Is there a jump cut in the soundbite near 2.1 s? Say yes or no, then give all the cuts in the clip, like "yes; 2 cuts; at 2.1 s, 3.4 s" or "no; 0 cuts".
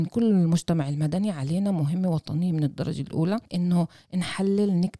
no; 1 cut; at 3.5 s